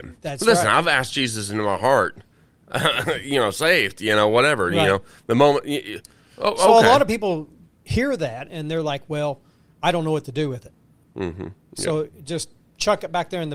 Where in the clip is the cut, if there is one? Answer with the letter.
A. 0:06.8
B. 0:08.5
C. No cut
B